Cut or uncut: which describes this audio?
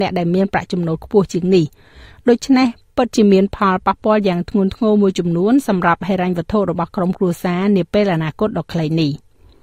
uncut